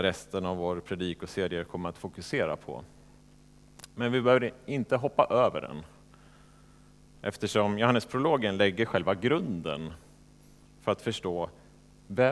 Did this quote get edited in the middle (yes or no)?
no